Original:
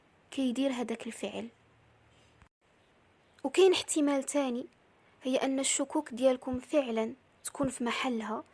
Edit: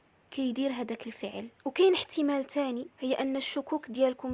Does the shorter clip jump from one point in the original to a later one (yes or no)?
yes